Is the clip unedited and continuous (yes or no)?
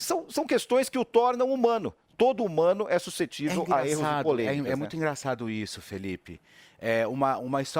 yes